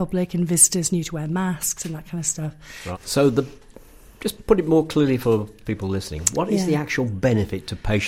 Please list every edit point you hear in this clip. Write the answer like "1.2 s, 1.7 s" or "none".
2.9 s

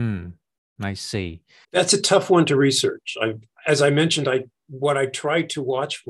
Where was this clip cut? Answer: 1.6 s

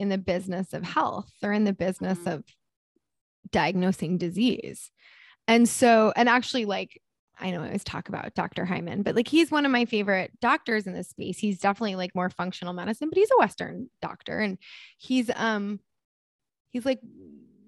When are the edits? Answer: none

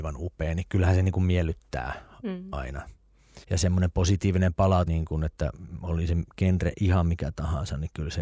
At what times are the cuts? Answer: 3.4 s, 4.9 s

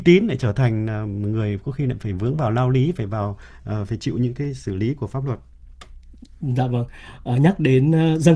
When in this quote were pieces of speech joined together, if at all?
none

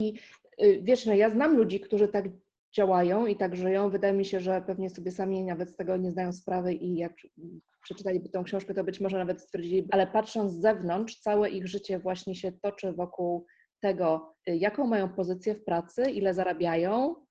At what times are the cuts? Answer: 9.9 s, 14.4 s

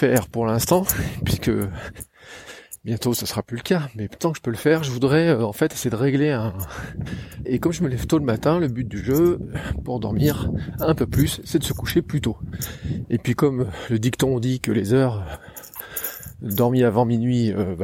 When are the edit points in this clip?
7.4 s

